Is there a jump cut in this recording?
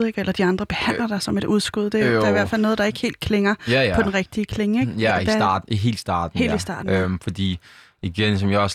no; 0 cuts

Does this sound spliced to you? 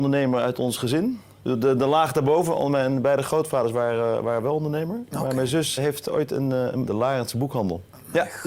yes; 2 cuts; at 5.8 s, 6.9 s

